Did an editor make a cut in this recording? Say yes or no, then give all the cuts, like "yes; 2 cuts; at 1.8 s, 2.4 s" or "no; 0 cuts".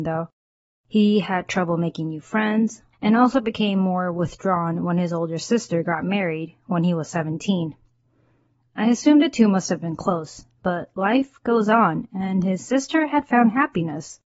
yes; 1 cut; at 2.9 s